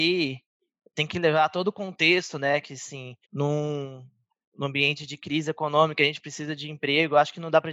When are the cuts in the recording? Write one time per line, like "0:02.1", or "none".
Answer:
0:03.2